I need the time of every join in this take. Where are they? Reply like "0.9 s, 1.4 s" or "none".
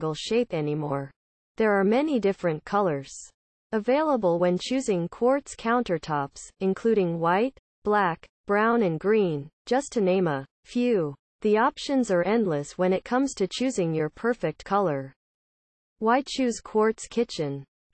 10.5 s, 15.9 s

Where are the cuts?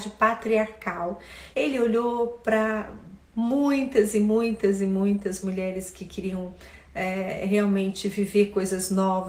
1.5 s, 5.4 s

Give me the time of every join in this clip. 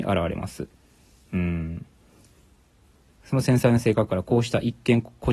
none

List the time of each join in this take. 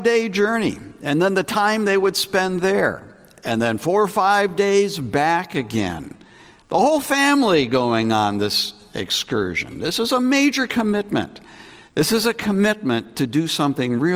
none

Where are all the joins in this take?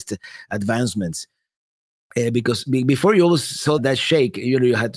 3.8 s

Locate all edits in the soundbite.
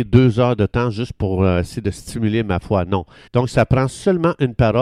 3.3 s

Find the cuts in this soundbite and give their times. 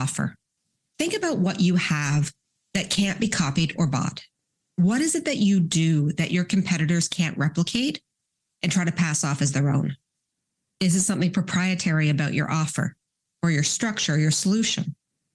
none

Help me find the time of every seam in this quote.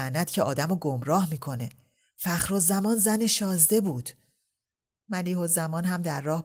none

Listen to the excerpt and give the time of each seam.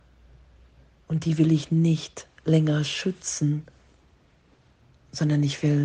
1.0 s

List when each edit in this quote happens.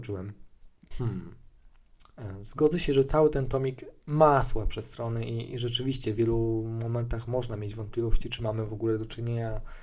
0.9 s

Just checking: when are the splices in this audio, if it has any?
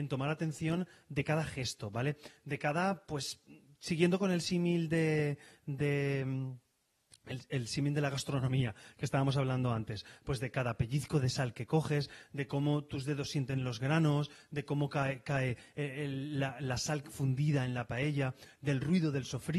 none

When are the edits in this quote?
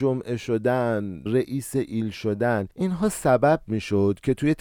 1.3 s

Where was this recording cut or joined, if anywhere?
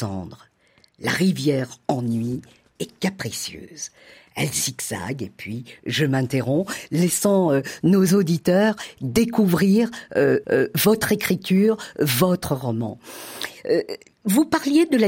10.4 s

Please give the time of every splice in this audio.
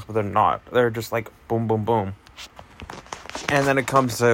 none

